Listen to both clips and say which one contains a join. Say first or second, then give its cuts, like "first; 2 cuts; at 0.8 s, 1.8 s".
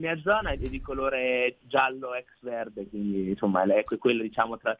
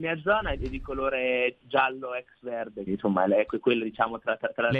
second; 1 cut; at 2.9 s